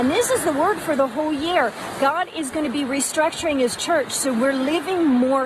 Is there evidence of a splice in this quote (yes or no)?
no